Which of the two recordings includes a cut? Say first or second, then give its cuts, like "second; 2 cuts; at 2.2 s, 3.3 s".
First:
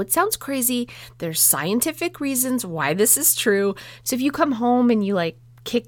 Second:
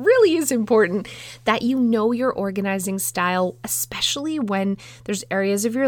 first; 1 cut; at 4.0 s